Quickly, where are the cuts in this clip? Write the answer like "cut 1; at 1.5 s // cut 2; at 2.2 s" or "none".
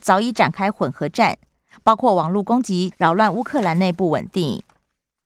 cut 1; at 2.9 s